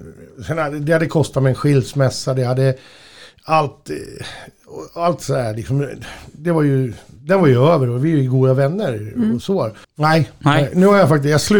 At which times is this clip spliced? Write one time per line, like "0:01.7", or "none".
0:09.8